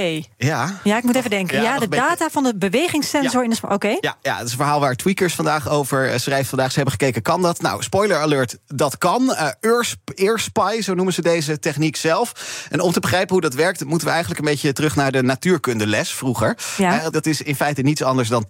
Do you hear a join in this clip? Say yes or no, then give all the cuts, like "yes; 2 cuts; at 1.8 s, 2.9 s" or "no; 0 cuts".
yes; 1 cut; at 17.1 s